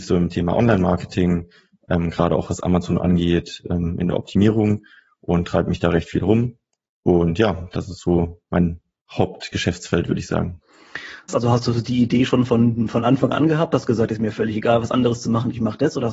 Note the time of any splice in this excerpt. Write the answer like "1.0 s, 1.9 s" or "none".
11.3 s